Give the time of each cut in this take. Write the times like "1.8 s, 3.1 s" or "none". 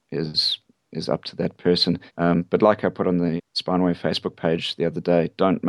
2.1 s, 3.4 s